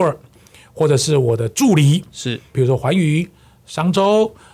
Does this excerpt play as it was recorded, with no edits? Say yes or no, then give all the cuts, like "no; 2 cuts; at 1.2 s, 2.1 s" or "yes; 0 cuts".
no; 1 cut; at 2.5 s